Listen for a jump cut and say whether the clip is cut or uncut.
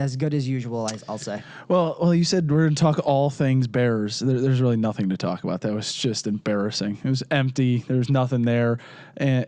uncut